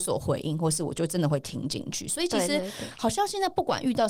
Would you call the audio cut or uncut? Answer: uncut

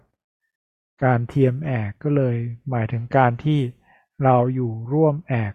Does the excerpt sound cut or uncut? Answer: uncut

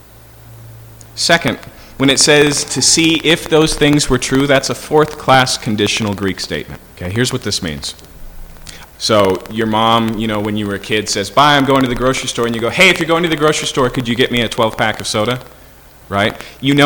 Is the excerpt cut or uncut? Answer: cut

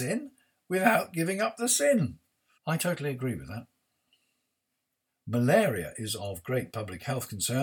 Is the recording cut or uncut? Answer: cut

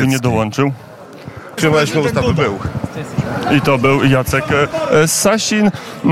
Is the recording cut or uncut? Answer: cut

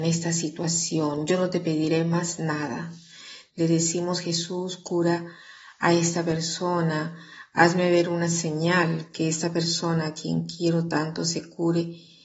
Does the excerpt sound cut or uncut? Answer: cut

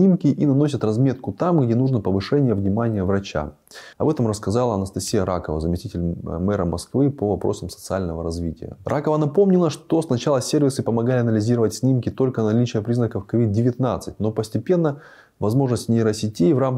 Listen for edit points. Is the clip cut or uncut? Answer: cut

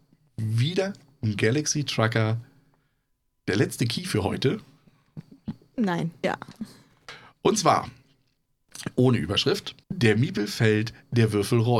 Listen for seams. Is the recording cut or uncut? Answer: cut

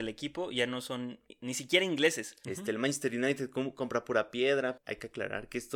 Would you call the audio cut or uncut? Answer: cut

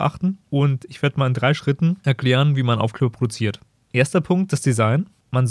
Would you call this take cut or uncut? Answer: uncut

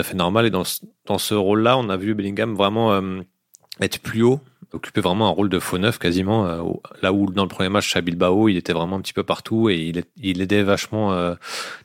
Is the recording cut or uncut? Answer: uncut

